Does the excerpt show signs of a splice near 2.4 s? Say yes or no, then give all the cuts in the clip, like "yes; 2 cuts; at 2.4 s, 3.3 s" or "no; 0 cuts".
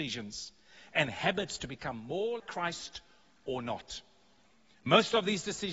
yes; 1 cut; at 2.4 s